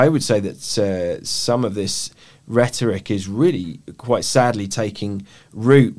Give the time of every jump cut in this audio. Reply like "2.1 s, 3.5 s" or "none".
none